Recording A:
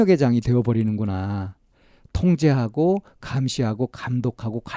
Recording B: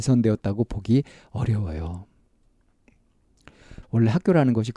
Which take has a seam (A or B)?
B